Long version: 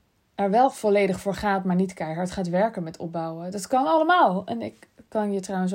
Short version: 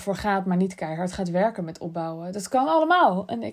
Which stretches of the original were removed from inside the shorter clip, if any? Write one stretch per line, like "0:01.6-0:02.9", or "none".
none